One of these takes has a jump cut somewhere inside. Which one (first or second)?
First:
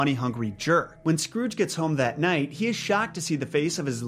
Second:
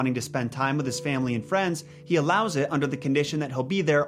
first